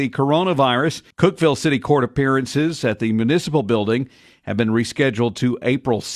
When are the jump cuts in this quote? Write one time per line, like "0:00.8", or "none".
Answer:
0:01.1